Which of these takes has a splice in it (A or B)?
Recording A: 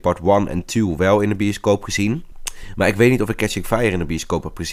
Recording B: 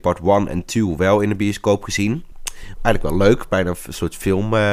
B